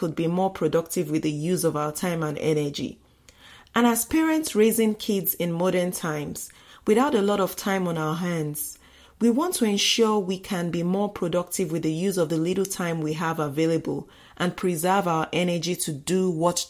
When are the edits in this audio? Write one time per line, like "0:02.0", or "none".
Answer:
none